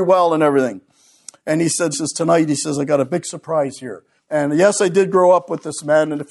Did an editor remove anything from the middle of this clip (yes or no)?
yes